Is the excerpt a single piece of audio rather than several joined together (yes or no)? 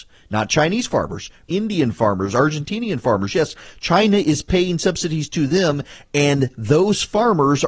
no